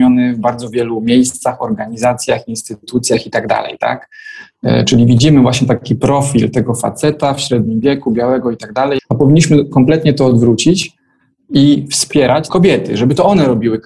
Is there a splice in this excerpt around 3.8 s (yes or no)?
no